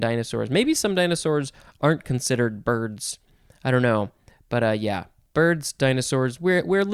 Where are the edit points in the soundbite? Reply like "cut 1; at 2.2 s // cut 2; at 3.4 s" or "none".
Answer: none